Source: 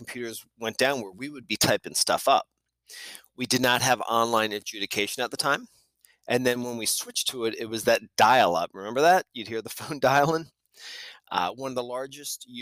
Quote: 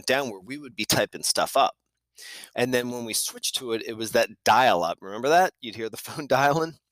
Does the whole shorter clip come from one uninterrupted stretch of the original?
no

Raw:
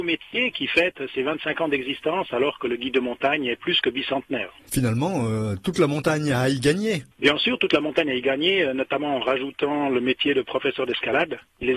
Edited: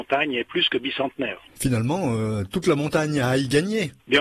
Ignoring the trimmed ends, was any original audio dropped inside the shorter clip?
no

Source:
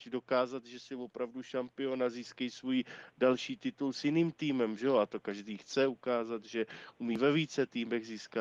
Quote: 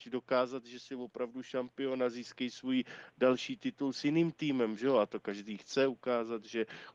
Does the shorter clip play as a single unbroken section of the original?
yes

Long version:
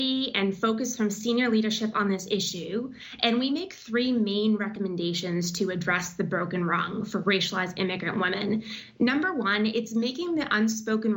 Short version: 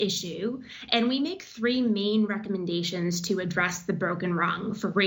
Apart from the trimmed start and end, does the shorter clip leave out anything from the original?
no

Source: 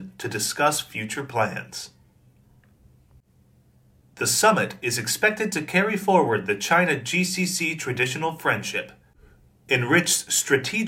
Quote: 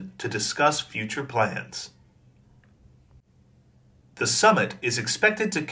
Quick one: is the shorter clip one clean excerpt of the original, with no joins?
yes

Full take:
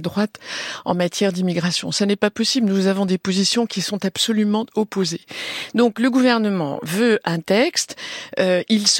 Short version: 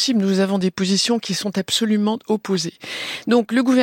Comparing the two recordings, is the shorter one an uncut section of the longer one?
yes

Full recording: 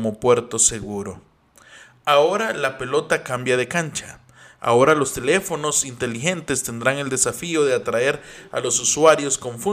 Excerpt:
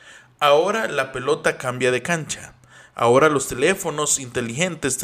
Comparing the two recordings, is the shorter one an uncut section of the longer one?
yes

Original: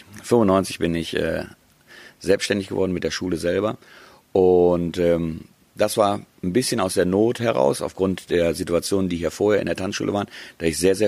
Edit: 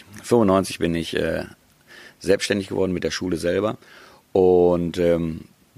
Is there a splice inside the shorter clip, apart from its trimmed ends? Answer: no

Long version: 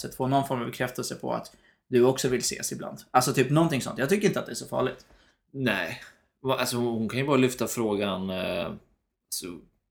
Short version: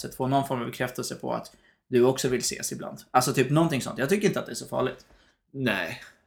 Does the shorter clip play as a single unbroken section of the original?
yes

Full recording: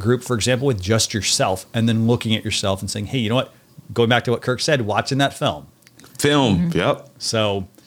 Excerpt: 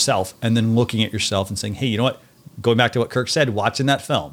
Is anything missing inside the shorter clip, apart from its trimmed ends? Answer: no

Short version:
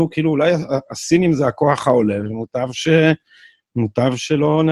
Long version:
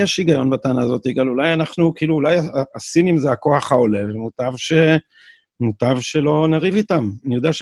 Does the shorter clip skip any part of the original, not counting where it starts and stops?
no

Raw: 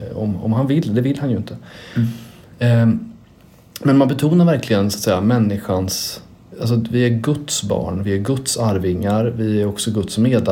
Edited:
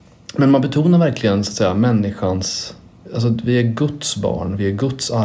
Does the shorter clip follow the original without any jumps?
yes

